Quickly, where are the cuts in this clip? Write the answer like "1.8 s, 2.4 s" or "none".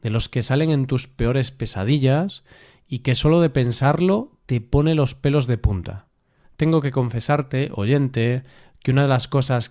6.4 s

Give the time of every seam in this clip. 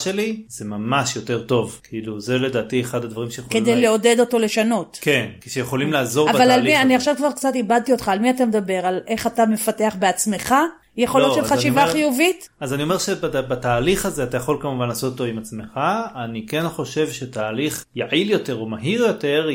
none

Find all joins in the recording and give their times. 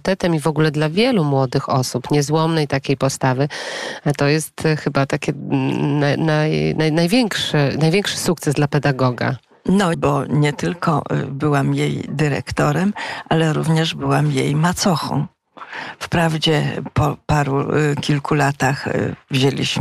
9.9 s

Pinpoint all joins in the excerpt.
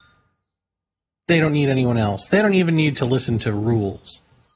none

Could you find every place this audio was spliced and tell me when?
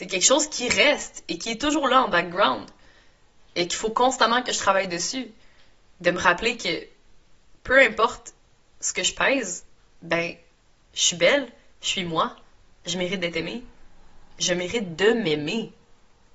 none

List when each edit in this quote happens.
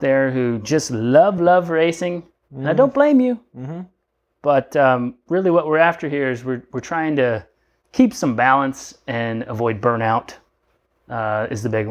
1.4 s

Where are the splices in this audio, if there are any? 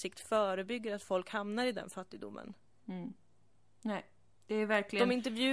2.7 s

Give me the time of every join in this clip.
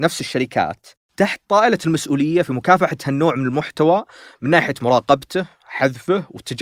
none

